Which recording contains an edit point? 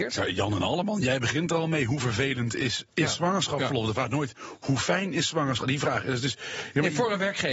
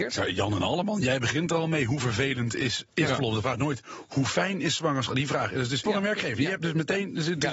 second; 2 cuts; at 3.1 s, 5.8 s

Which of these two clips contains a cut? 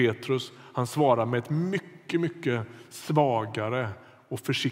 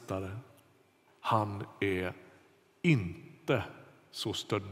second; 1 cut; at 1.1 s

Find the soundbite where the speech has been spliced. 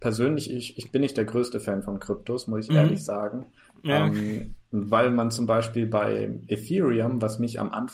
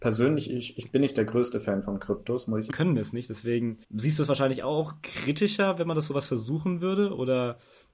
second; 2 cuts; at 2.7 s, 3.8 s

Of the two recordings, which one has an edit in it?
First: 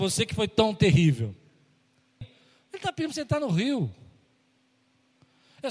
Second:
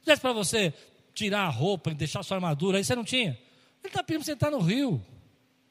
first; 1 cut; at 2.2 s

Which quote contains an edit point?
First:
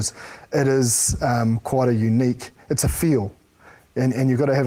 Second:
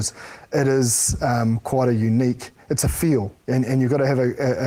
second; 1 cut; at 3.4 s

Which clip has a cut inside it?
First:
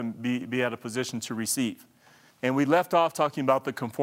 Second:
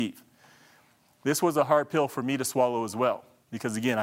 first; 1 cut; at 2.3 s

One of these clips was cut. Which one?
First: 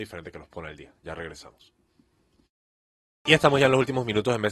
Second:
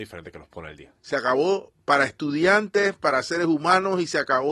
second; 1 cut; at 1.0 s

